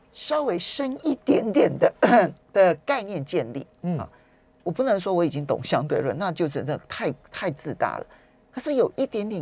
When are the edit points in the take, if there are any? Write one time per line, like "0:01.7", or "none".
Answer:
none